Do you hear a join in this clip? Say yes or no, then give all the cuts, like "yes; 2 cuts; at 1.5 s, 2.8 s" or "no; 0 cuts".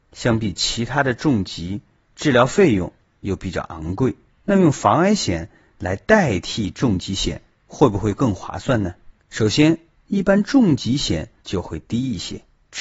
yes; 2 cuts; at 9.2 s, 11.4 s